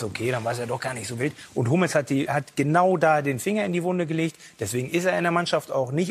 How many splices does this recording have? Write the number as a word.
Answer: one